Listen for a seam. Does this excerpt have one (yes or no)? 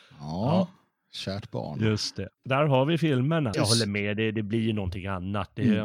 yes